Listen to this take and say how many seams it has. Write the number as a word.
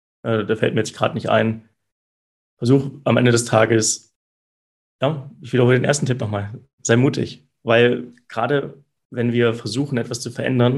zero